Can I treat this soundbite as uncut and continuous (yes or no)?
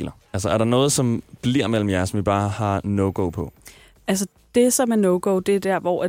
yes